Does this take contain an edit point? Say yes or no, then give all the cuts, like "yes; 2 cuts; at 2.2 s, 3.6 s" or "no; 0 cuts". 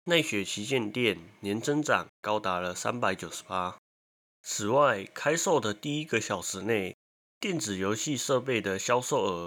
no; 0 cuts